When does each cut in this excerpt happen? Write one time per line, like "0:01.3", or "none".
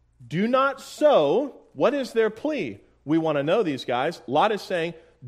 none